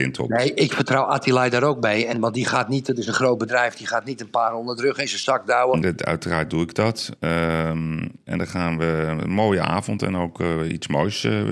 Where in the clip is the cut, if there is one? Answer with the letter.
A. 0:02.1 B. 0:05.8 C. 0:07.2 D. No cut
B